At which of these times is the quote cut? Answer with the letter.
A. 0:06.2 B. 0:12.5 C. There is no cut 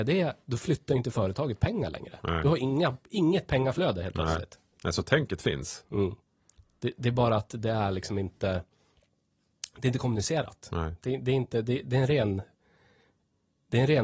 C